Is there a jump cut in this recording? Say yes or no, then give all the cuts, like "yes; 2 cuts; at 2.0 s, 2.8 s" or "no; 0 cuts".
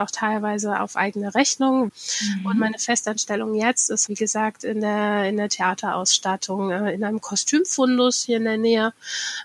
yes; 1 cut; at 4.1 s